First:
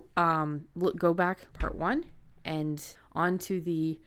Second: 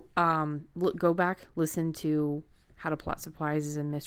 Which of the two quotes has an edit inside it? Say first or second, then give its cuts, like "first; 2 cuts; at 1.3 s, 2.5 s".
first; 2 cuts; at 1.5 s, 3.0 s